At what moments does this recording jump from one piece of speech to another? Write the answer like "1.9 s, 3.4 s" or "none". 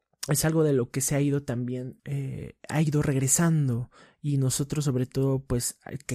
2.0 s